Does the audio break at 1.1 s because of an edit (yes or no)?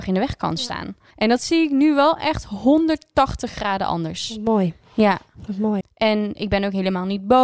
yes